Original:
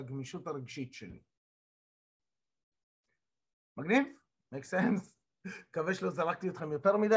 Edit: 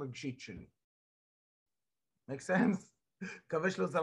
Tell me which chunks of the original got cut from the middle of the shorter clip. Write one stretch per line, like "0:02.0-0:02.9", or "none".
0:02.6-0:04.3